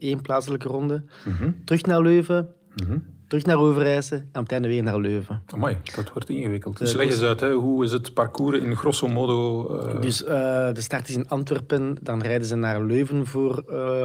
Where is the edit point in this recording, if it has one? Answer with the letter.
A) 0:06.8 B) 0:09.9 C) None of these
A